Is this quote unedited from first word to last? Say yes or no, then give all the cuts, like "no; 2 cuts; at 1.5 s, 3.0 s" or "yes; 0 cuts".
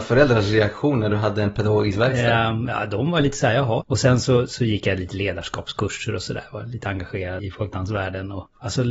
no; 2 cuts; at 3.8 s, 7.4 s